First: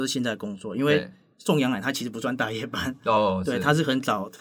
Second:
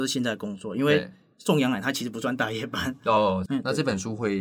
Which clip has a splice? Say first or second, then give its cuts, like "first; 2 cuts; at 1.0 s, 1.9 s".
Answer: second; 1 cut; at 3.5 s